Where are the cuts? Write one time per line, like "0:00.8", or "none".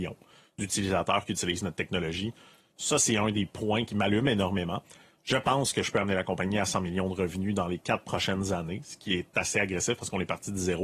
0:02.8
0:03.9
0:05.1